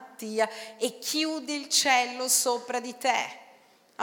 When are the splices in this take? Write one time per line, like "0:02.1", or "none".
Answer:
none